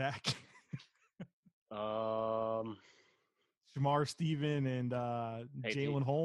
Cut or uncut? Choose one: uncut